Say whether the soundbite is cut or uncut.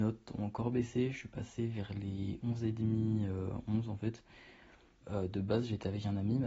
cut